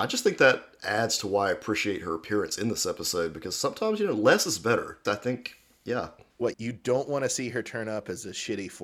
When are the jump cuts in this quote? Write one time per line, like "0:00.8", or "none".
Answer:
0:05.0
0:06.5